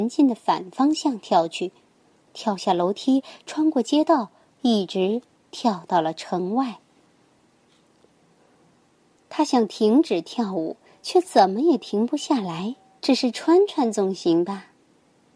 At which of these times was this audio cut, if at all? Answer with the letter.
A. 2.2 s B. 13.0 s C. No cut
B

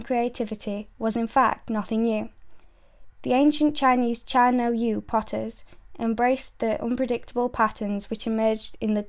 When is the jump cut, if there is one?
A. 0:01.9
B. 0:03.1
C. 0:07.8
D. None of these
D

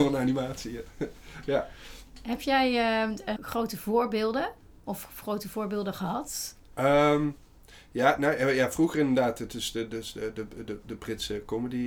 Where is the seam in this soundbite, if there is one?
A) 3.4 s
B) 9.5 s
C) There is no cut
A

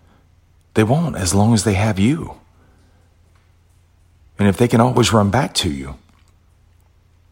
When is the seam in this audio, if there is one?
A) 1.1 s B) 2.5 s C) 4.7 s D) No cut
D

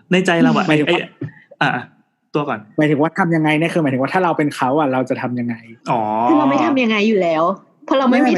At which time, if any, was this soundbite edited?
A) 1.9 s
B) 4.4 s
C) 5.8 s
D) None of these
C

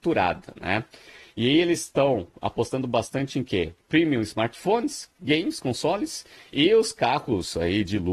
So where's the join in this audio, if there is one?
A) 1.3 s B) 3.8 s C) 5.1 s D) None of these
D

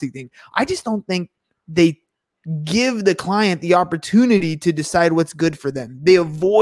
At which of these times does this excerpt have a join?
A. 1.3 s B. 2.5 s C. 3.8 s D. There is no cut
D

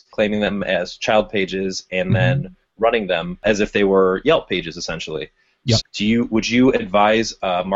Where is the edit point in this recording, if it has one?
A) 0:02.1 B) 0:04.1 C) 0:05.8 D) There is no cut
C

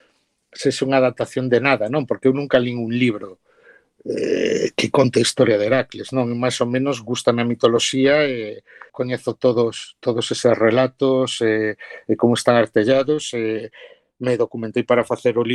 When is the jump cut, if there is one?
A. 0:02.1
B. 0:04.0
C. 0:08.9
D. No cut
C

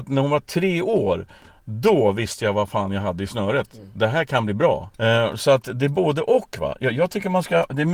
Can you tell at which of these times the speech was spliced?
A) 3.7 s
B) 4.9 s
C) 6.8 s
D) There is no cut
B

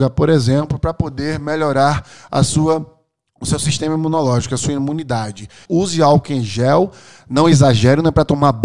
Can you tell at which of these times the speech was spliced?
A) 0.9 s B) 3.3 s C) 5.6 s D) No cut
C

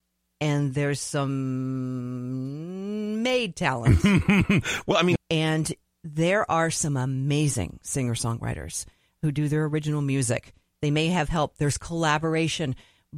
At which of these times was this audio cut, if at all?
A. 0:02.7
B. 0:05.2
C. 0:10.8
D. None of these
B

